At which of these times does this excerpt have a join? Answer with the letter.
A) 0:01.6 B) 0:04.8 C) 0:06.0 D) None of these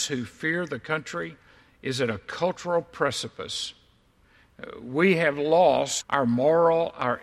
C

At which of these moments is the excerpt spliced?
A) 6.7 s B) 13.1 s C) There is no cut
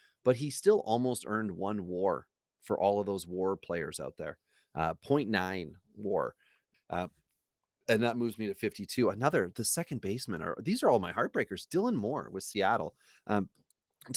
A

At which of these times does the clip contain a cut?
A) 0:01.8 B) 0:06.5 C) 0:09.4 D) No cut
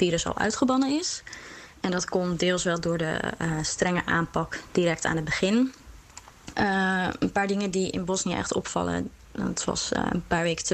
B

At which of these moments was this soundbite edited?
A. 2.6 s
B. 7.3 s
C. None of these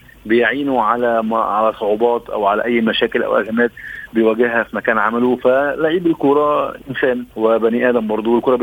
B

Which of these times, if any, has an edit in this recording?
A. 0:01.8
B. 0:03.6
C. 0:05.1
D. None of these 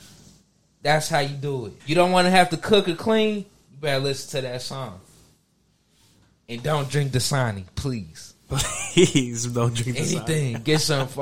A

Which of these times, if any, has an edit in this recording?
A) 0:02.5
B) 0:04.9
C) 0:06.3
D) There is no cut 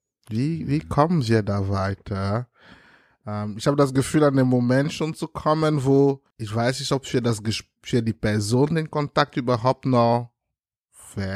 C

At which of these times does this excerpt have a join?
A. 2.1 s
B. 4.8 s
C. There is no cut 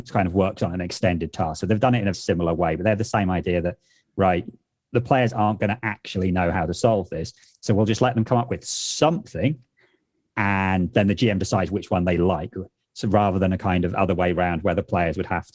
A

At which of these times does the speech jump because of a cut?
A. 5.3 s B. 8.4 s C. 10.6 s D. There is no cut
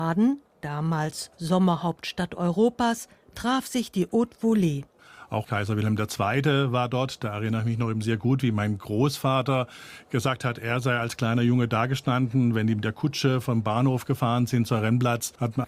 D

